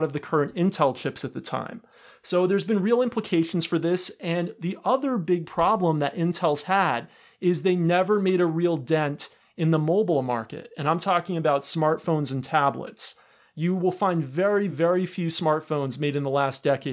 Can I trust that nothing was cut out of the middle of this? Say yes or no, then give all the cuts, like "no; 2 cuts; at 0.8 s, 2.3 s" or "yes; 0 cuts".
no; 1 cut; at 14.7 s